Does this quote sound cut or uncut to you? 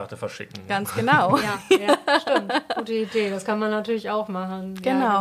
uncut